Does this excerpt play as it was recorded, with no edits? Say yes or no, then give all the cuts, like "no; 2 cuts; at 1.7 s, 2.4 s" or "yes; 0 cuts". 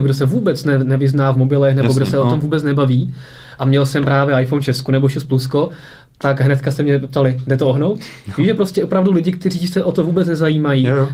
no; 1 cut; at 3.6 s